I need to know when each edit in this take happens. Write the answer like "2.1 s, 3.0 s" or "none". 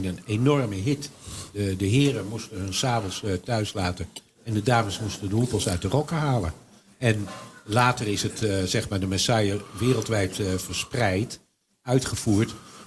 none